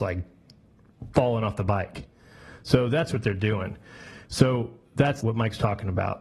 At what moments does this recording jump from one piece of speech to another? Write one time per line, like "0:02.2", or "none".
0:04.2